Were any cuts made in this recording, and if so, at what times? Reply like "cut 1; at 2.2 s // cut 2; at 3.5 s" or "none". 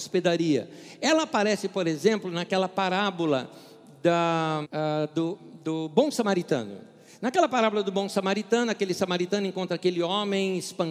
cut 1; at 4.6 s